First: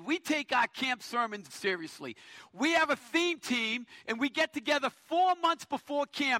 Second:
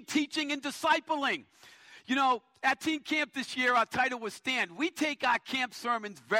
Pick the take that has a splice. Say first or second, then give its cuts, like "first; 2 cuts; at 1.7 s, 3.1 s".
first; 1 cut; at 1.5 s